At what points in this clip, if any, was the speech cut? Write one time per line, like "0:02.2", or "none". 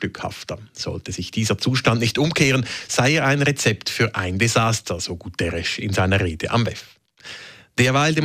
none